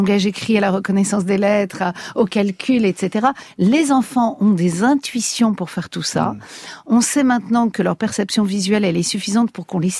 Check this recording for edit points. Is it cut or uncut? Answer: uncut